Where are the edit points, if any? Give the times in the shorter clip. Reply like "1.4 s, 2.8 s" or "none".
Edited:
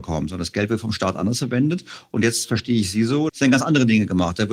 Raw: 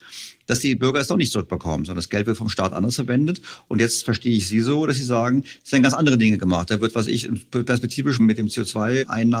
3.3 s